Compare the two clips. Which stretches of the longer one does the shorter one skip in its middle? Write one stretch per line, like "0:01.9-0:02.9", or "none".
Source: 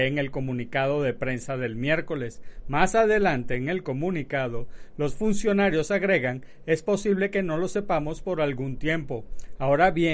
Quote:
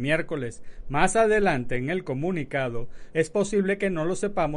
0:04.9-0:06.6